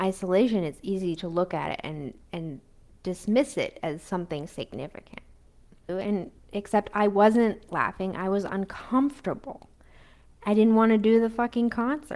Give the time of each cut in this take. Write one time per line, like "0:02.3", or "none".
0:05.9